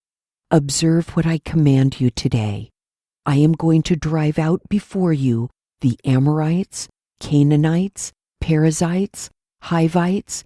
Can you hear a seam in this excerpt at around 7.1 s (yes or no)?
no